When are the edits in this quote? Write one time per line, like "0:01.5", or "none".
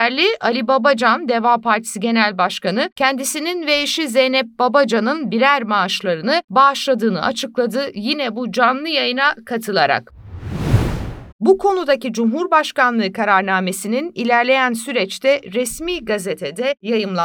0:11.3